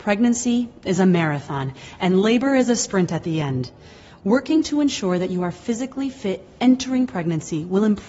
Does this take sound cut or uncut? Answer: uncut